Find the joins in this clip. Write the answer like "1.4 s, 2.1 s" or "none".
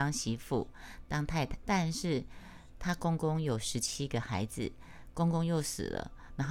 1.6 s